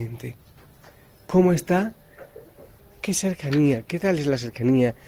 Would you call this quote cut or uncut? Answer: cut